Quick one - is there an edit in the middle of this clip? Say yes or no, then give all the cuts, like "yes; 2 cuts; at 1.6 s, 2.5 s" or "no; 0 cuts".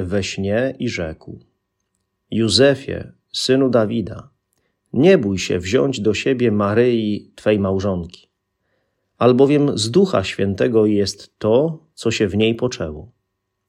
no; 0 cuts